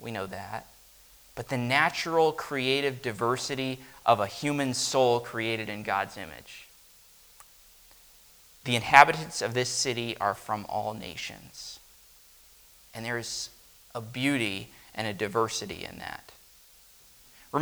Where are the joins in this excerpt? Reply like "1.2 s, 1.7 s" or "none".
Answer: none